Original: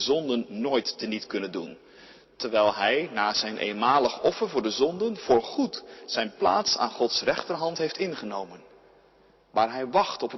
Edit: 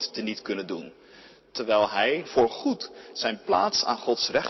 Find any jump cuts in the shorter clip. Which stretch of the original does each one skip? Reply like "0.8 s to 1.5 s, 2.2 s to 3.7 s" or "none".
3.1 s to 5.2 s